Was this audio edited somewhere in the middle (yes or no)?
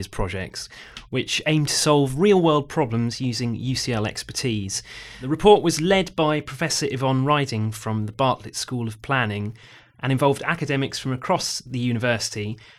no